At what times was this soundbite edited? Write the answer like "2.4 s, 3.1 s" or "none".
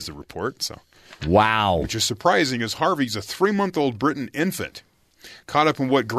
1.8 s